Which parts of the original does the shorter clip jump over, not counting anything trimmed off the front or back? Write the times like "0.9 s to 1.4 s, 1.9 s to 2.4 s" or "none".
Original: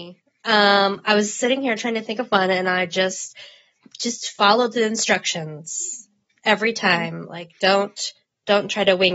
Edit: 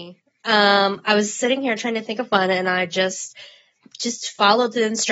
none